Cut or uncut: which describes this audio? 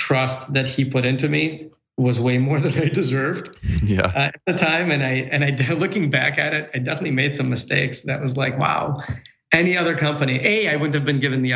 uncut